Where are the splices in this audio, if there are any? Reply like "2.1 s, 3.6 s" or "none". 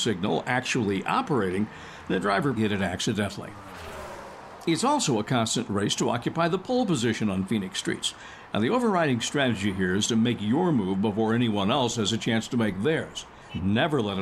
2.6 s